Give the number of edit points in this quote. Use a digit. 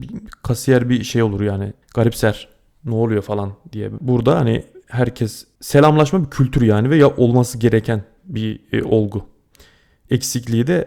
1